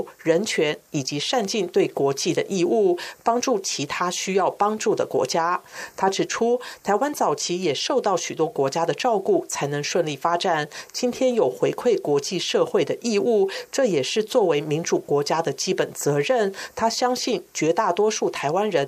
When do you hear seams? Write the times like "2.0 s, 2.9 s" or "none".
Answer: none